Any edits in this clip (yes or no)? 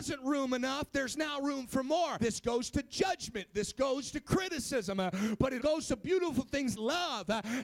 yes